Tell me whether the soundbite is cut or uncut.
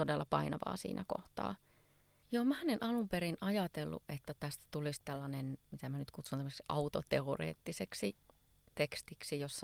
cut